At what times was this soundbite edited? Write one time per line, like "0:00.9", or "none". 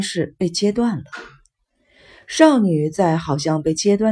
none